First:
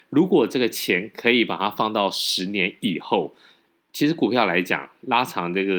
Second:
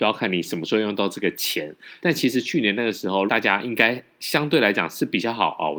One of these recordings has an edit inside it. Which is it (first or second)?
second